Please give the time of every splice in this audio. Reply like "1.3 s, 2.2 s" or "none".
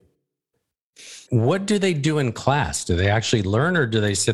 1.3 s